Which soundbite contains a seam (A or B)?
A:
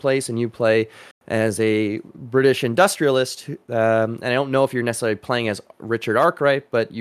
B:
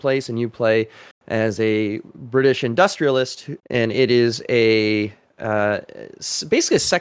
B